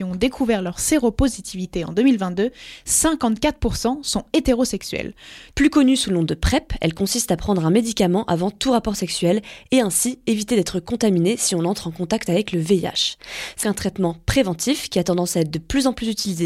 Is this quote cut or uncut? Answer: cut